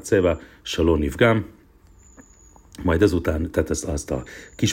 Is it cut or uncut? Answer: uncut